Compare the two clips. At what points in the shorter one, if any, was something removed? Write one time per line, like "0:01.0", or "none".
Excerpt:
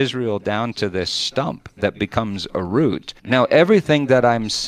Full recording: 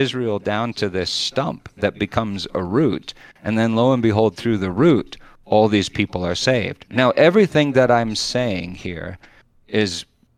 0:03.2